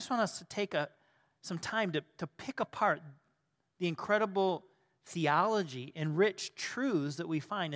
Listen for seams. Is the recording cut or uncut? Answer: uncut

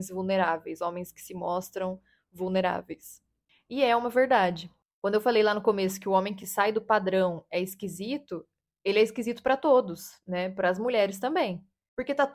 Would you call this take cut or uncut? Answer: uncut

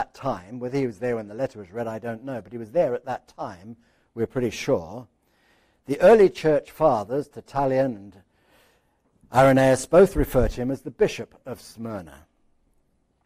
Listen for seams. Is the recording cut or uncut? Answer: uncut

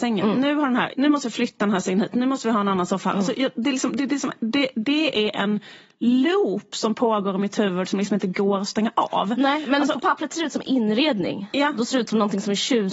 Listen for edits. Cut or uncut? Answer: cut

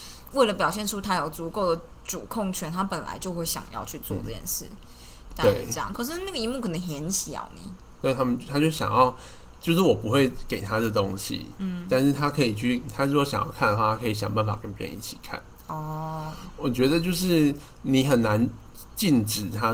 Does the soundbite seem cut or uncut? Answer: cut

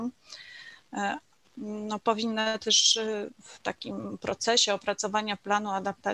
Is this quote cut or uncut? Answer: cut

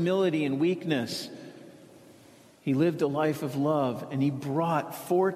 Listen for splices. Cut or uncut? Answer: uncut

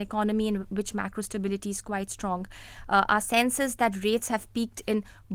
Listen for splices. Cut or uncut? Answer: uncut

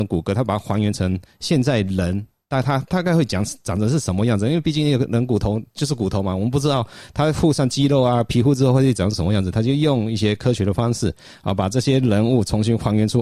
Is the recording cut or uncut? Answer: uncut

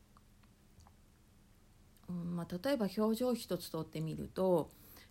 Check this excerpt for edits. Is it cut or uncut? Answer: uncut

